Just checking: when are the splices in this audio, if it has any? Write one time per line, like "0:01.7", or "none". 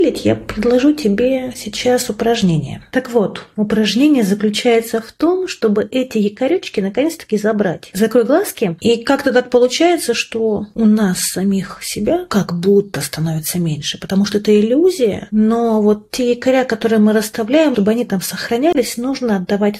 0:02.9
0:08.8
0:17.7